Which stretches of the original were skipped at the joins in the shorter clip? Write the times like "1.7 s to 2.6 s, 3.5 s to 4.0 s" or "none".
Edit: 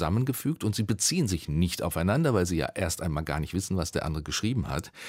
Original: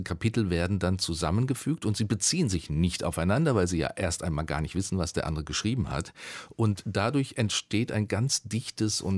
none